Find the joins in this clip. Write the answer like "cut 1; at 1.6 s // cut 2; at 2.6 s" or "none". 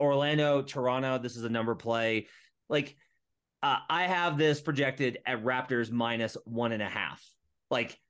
cut 1; at 2.6 s